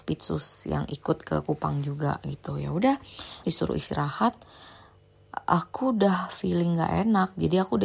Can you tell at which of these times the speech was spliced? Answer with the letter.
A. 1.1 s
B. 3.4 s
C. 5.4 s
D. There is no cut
B